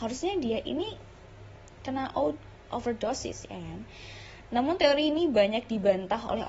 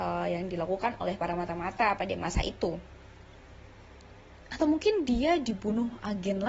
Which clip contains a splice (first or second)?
first